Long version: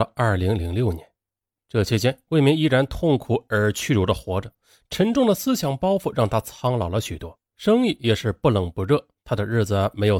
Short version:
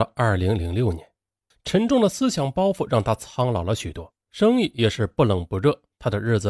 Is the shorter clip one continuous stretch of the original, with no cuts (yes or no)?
no